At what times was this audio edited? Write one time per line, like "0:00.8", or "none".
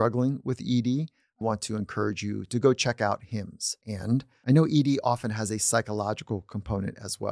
0:01.4